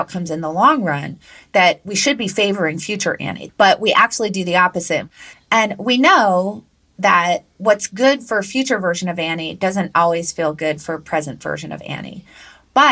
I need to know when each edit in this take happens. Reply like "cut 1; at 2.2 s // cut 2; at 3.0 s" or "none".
cut 1; at 3.5 s // cut 2; at 5.3 s